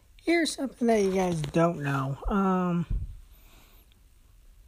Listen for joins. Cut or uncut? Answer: uncut